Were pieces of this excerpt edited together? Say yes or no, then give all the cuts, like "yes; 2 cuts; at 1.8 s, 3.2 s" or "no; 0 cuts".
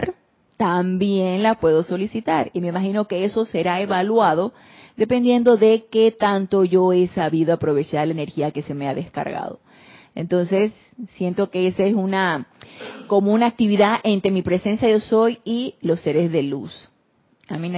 no; 0 cuts